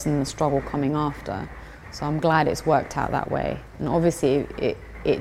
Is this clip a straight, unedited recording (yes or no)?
yes